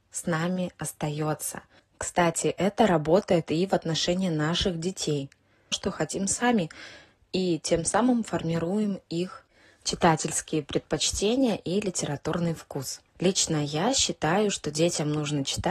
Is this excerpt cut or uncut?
cut